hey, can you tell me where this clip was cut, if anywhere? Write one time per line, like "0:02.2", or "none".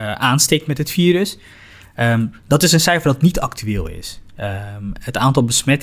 none